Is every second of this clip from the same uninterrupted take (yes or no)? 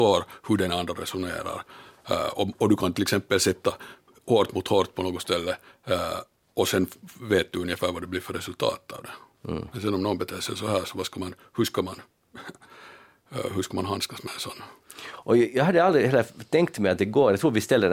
yes